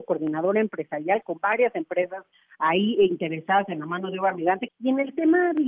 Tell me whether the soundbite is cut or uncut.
cut